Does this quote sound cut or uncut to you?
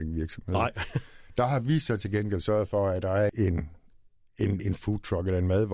cut